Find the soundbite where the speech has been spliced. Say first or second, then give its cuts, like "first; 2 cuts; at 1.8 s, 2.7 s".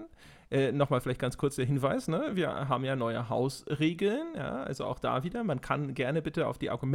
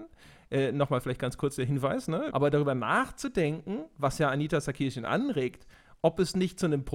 second; 1 cut; at 2.3 s